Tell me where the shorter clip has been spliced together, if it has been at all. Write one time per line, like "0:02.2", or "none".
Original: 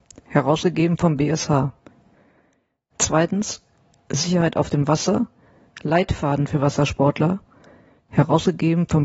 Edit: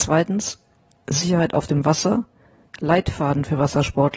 none